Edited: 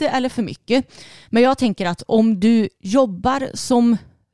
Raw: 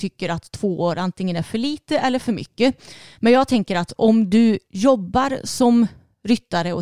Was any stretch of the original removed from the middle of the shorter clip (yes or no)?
no